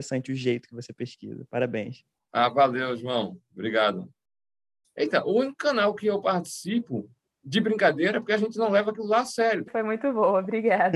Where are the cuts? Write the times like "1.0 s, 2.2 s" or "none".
4.8 s, 9.7 s